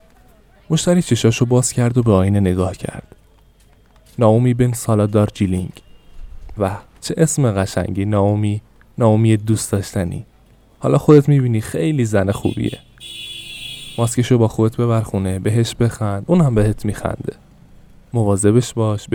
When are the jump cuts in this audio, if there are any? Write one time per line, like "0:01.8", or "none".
0:06.6

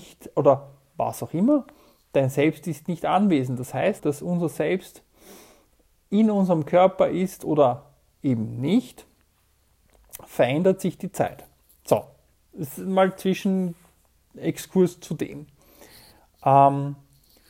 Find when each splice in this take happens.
0:04.0

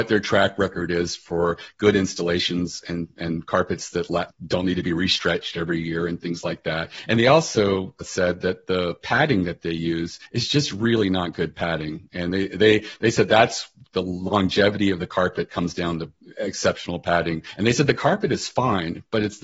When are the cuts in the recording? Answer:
none

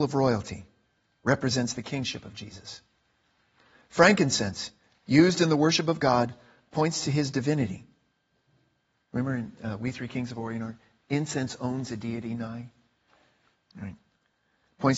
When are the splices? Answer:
none

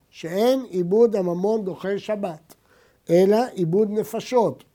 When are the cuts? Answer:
none

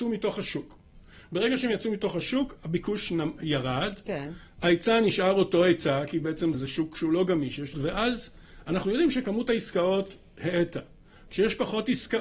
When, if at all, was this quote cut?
0:06.5
0:07.7

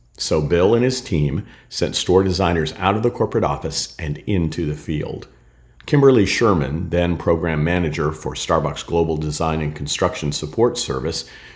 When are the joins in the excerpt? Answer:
0:05.8

